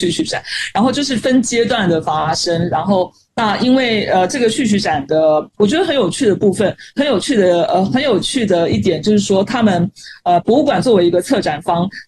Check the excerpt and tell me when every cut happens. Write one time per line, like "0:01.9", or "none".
0:05.5